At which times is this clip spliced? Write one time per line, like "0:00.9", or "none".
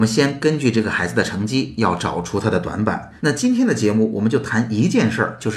0:03.2